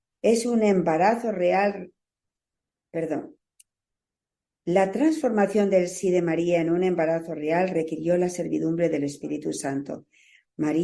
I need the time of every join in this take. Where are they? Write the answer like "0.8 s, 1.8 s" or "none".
none